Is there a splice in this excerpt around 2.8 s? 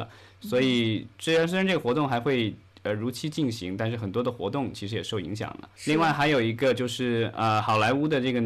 no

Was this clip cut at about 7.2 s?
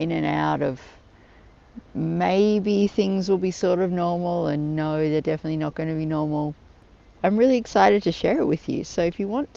yes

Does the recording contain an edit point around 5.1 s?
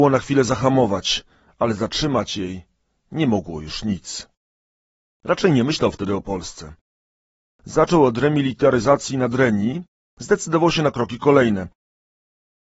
yes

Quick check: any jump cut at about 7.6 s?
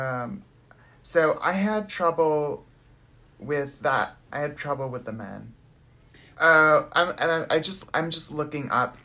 no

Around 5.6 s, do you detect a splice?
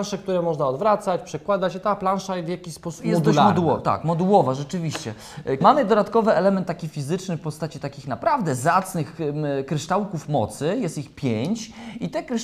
yes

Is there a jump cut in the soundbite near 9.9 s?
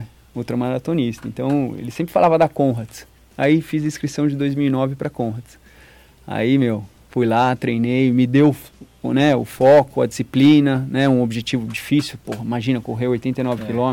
no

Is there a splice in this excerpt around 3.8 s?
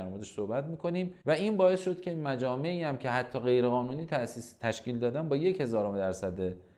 no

